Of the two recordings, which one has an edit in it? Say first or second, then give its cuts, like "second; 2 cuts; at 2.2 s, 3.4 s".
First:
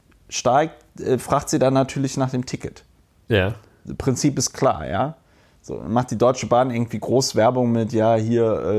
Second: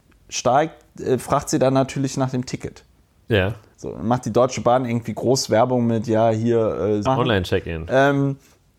second; 2 cuts; at 3.7 s, 7.1 s